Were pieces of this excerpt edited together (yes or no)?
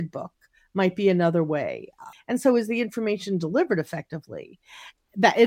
yes